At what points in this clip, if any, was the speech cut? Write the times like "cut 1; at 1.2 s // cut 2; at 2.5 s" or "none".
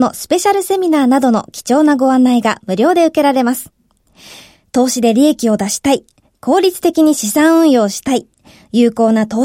none